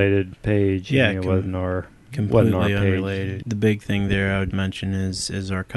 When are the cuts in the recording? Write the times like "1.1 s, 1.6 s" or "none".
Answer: 3.4 s, 4.5 s